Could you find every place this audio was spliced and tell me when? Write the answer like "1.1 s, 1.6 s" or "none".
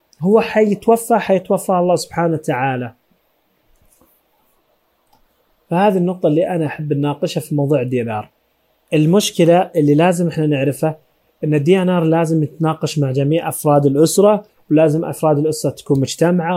none